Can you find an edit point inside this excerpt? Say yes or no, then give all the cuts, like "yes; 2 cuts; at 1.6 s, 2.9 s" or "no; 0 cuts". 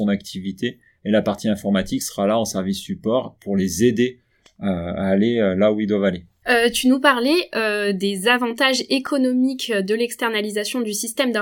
yes; 1 cut; at 6.4 s